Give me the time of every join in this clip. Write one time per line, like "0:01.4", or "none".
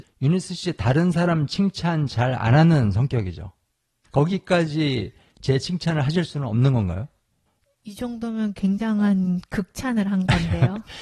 0:04.0